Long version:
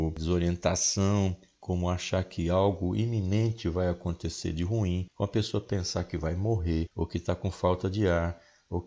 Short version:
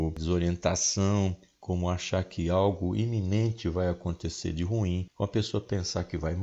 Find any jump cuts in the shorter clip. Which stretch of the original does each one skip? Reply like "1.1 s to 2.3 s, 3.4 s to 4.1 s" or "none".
none

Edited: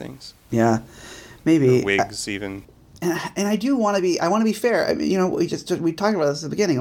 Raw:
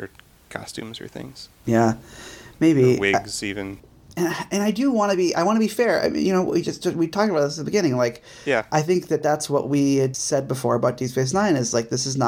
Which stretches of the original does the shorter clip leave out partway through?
none

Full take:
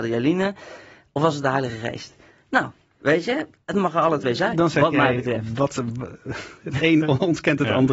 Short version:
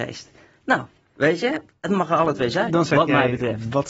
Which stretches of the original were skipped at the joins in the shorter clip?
none

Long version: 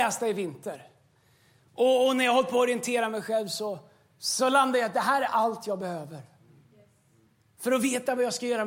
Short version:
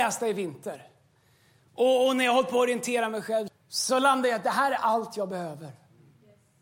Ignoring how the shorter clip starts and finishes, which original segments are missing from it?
3.5 s to 4.0 s

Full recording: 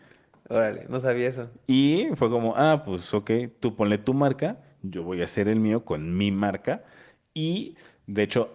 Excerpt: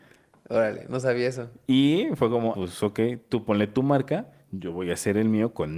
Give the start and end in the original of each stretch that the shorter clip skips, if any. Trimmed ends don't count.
2.5 s to 2.8 s

